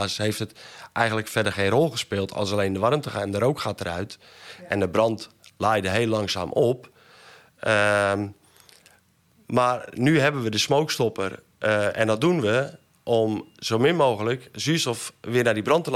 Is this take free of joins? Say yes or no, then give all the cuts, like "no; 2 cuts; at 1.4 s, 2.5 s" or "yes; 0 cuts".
yes; 0 cuts